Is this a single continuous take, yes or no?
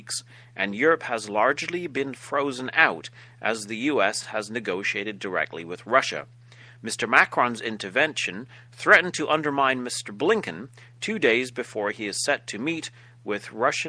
yes